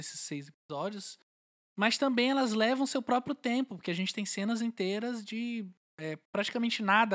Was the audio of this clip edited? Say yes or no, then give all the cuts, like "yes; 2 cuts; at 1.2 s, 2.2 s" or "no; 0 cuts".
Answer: no; 0 cuts